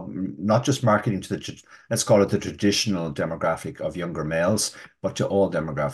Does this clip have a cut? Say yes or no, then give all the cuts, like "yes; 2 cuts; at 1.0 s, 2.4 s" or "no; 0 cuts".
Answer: no; 0 cuts